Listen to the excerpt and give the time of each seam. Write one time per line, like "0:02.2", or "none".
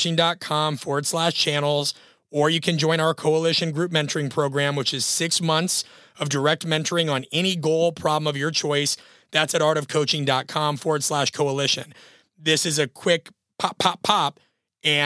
none